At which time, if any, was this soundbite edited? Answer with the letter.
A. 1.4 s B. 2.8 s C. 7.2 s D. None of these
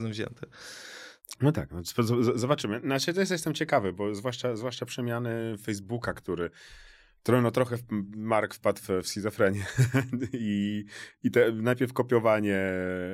D